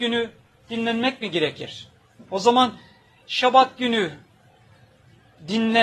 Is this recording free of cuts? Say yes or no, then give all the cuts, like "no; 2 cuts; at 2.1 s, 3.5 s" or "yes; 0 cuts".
yes; 0 cuts